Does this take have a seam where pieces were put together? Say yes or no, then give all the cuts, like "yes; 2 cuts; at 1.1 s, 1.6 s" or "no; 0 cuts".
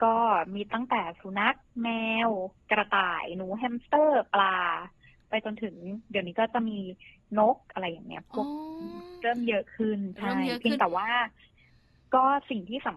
no; 0 cuts